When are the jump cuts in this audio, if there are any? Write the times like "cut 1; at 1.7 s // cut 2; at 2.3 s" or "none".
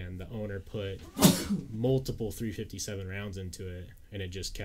none